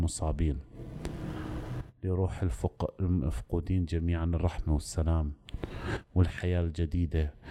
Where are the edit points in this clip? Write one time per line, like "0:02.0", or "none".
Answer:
none